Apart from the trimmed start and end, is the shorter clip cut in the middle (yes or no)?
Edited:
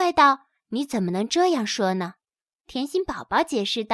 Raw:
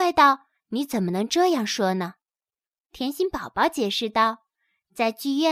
yes